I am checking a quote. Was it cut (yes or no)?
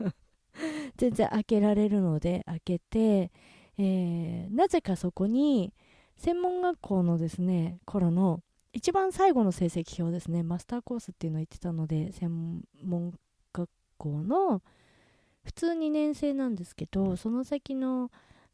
no